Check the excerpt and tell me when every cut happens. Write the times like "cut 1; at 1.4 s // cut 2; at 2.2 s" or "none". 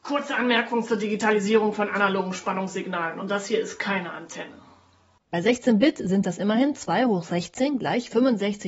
cut 1; at 5.2 s